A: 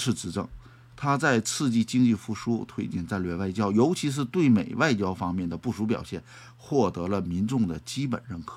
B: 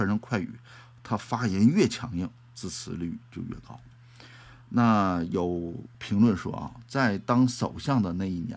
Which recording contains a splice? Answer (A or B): B